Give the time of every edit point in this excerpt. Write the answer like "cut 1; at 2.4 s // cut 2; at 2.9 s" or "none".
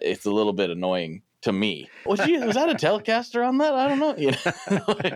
cut 1; at 2.1 s